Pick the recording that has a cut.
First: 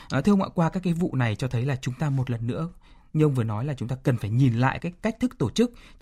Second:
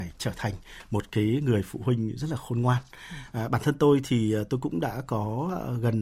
first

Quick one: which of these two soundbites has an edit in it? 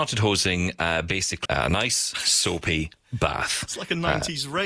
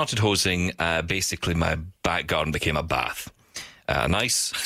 first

